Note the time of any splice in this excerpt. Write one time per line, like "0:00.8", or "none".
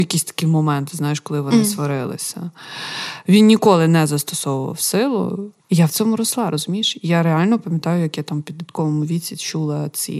0:05.6